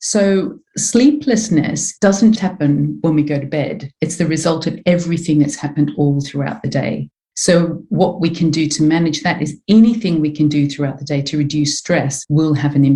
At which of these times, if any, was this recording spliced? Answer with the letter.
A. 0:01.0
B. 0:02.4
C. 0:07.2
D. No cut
B